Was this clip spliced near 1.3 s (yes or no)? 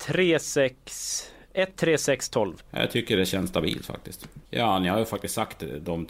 no